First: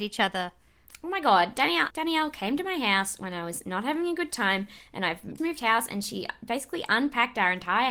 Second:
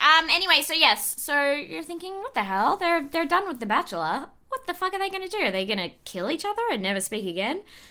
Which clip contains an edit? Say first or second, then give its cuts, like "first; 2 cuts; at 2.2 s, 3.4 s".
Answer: first; 2 cuts; at 1.9 s, 5.4 s